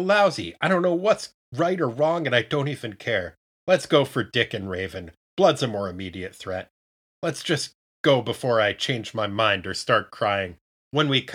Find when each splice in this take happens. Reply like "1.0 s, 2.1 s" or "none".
none

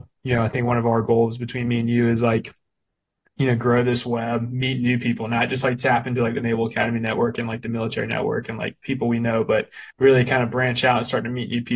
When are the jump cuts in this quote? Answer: 9.9 s

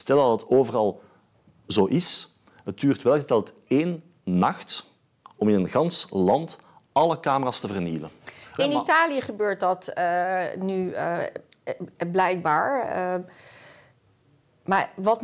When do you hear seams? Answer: 8.6 s

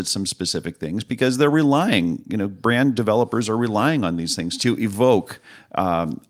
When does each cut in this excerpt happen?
4.6 s

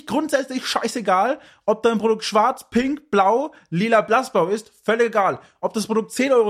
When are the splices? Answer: none

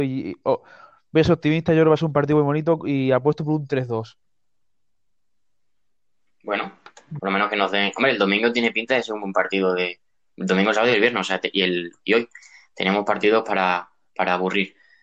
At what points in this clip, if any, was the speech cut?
none

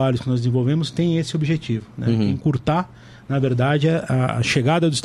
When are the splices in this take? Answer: none

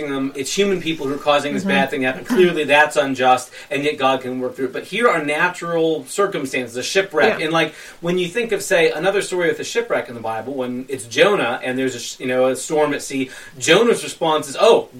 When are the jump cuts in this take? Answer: none

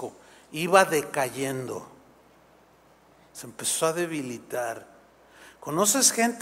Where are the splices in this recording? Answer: none

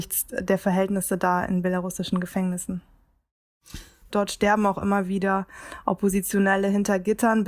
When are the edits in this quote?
4.1 s

